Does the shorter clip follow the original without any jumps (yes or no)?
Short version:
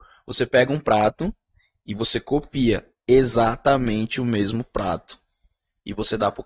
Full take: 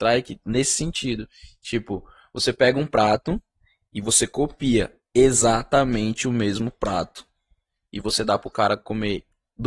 yes